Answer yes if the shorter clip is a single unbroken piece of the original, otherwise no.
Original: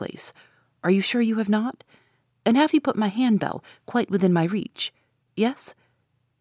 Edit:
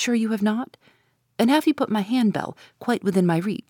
yes